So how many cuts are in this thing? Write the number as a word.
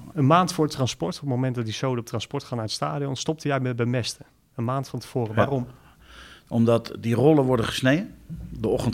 zero